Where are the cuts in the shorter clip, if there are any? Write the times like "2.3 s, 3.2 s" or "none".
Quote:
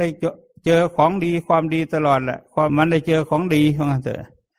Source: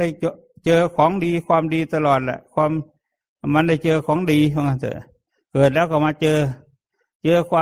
2.7 s